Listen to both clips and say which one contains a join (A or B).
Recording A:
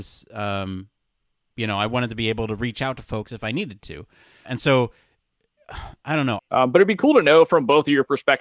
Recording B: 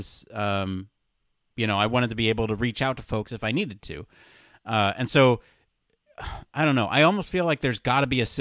A